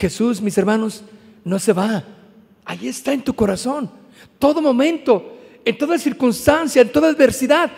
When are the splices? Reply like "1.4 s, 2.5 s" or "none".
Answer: none